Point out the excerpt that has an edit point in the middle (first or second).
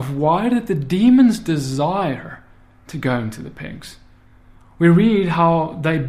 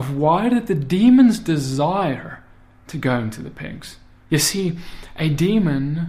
second